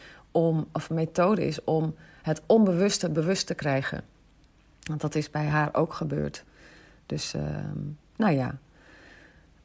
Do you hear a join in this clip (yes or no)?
no